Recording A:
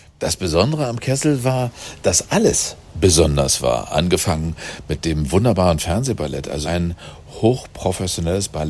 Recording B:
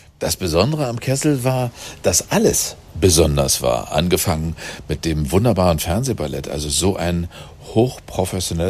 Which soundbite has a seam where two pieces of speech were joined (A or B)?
A